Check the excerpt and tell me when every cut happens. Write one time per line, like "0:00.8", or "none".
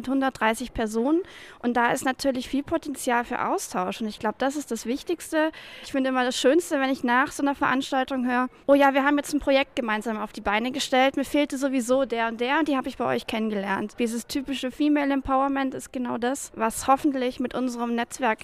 none